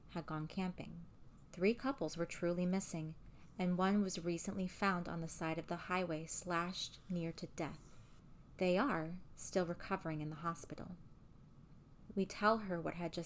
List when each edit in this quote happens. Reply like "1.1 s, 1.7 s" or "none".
9.3 s, 12.1 s